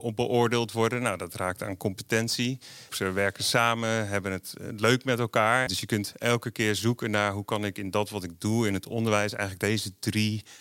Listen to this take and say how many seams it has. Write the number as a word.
two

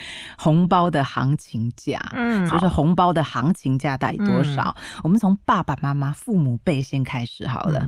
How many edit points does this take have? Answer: one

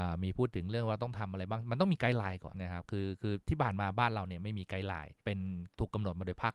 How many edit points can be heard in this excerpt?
two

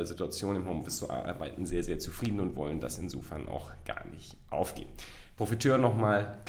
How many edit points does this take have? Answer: zero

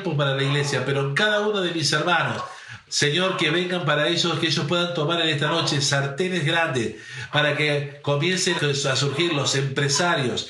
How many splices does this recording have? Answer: two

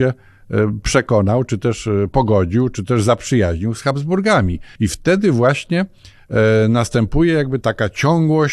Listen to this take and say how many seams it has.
two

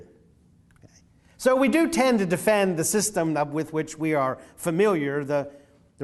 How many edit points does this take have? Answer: zero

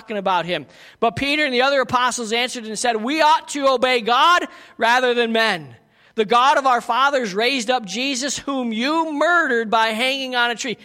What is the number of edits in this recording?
zero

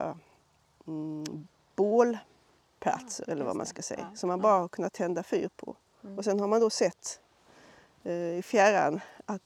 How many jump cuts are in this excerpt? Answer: zero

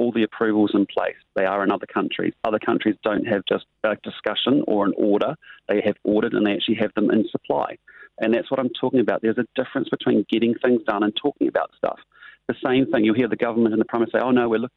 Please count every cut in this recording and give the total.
one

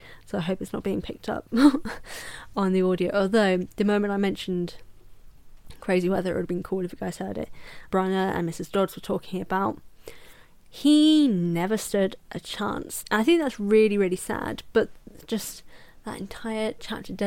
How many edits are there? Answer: two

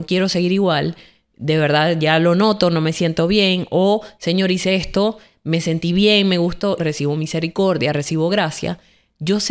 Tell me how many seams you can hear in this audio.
one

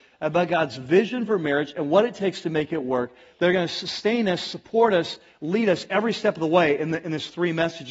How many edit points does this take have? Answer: zero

